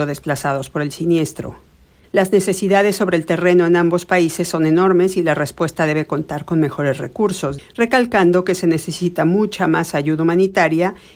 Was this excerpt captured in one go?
no; 1 cut; at 7.6 s

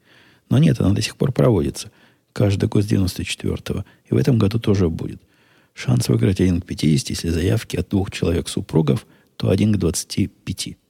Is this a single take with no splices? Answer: yes; 0 cuts

